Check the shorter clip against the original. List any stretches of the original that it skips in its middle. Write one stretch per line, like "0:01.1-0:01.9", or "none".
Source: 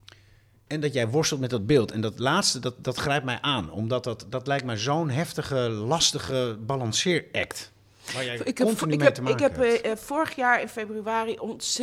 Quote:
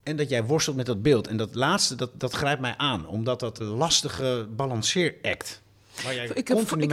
0:04.2-0:05.7